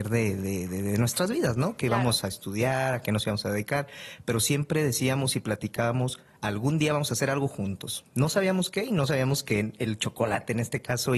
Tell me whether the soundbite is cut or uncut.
uncut